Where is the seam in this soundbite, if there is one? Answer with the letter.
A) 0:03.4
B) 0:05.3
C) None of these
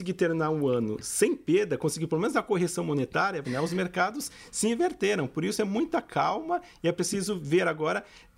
A